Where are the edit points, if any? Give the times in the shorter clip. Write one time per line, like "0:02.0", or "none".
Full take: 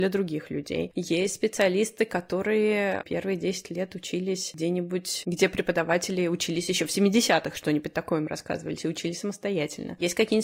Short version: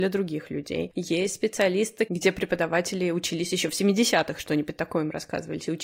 0:02.1